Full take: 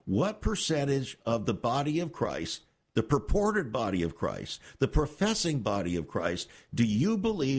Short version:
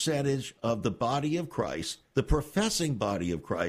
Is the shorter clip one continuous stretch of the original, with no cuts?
no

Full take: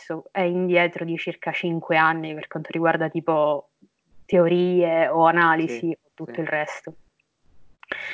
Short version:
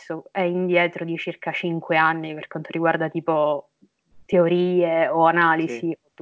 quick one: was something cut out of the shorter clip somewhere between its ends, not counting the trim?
no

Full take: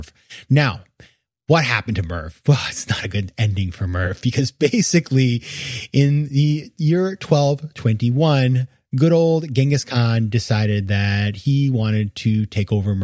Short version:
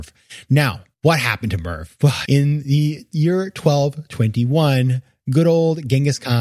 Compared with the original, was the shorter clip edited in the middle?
yes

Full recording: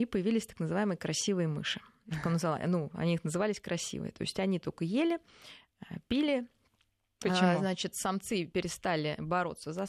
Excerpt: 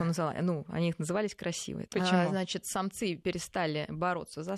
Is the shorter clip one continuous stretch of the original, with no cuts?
no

